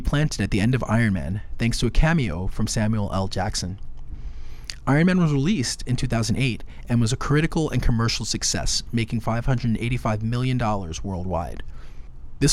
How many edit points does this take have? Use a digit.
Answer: 0